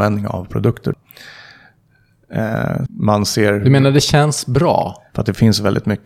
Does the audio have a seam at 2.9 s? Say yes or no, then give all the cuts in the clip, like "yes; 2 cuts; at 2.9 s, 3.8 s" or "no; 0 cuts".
yes; 2 cuts; at 2.9 s, 5.1 s